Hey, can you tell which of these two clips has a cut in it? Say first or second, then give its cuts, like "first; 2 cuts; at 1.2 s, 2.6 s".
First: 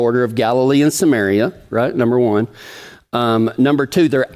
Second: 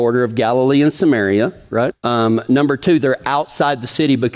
second; 1 cut; at 1.9 s